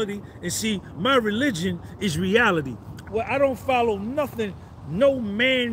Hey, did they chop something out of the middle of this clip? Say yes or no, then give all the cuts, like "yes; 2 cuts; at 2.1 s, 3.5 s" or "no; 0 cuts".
yes; 2 cuts; at 3.0 s, 4.8 s